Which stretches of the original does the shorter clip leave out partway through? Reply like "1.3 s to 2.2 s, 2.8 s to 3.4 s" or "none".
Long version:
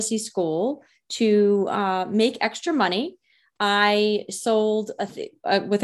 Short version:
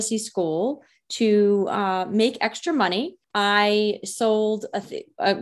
3.2 s to 3.5 s